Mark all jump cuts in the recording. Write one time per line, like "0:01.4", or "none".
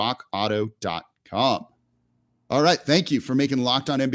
none